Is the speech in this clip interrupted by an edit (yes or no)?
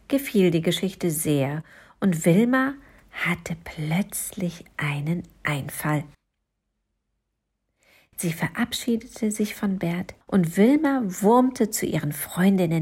yes